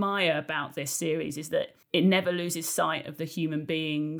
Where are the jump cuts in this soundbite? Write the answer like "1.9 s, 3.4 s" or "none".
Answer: 1.8 s